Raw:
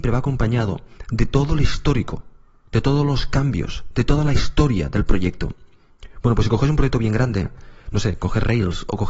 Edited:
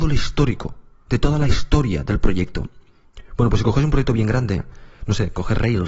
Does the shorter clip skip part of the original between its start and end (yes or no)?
yes